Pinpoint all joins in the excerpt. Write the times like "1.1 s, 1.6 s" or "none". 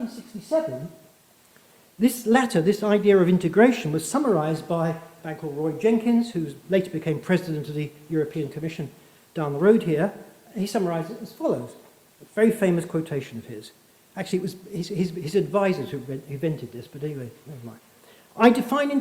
none